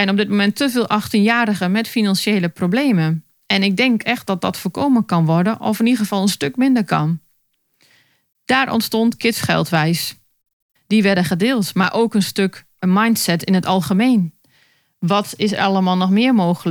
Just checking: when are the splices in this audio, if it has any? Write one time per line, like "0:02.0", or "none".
0:10.8